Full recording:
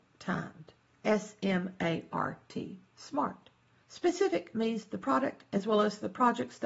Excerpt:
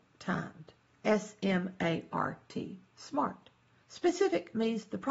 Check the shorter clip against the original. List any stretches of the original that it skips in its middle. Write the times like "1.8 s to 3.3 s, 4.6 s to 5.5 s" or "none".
none